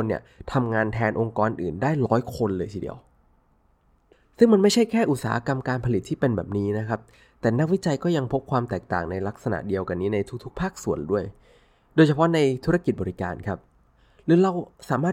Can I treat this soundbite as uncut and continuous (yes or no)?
yes